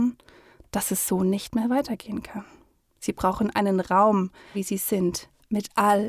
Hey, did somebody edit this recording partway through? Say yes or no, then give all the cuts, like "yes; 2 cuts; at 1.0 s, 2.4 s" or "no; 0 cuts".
yes; 2 cuts; at 2.9 s, 4.5 s